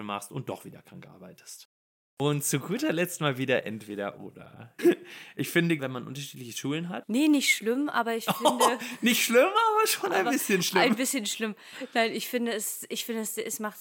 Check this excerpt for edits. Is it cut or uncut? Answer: cut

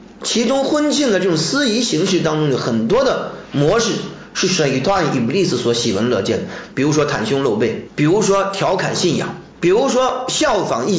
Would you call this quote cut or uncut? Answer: cut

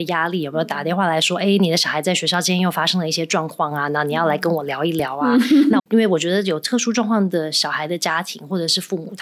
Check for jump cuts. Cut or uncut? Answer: cut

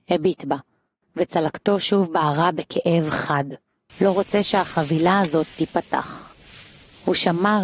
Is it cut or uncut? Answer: cut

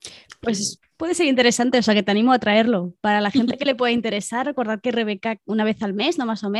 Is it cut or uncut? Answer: uncut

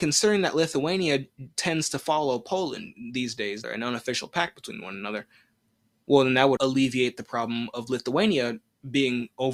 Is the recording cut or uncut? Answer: cut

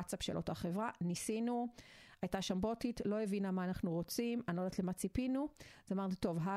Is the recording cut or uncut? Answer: uncut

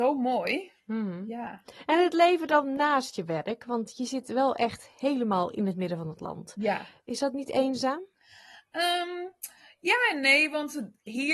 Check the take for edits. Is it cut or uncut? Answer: uncut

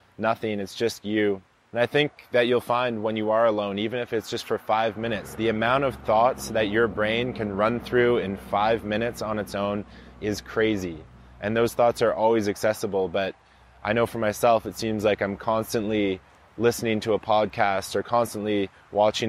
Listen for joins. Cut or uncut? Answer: uncut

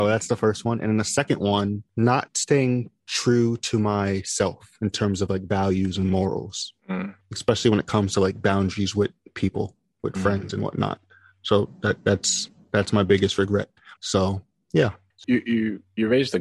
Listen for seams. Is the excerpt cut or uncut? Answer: cut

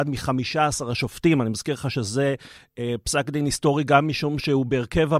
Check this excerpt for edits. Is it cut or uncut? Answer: uncut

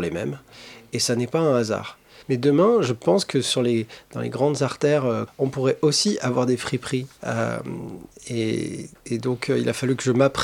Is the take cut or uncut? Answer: cut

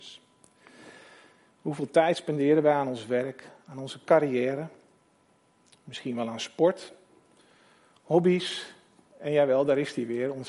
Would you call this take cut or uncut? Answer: cut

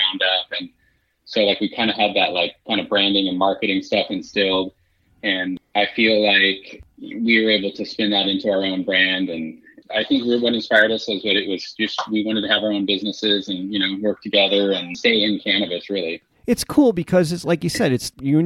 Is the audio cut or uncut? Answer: uncut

